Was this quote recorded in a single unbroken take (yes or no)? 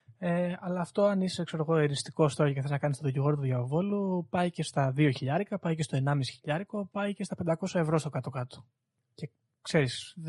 yes